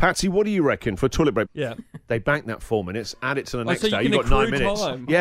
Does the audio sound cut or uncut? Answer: cut